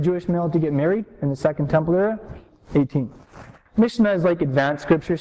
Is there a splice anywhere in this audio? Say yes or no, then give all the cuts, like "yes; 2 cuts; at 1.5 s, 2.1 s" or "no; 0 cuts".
yes; 1 cut; at 3.7 s